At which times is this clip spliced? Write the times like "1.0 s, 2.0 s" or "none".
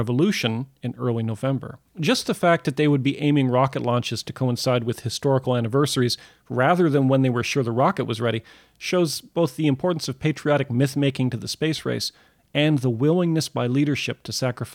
1.9 s